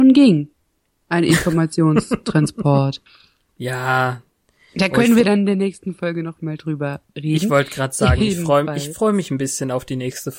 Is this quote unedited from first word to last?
no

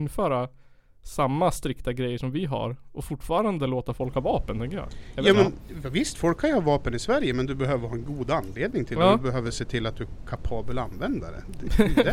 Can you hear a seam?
no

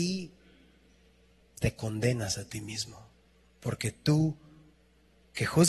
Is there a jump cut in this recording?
yes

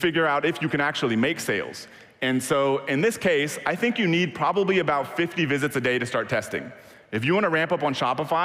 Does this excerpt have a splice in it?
no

